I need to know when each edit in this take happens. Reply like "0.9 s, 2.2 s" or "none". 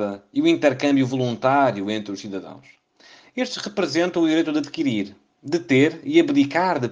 none